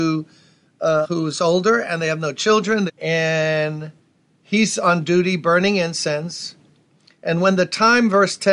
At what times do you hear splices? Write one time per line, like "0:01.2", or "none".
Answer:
0:01.0
0:02.9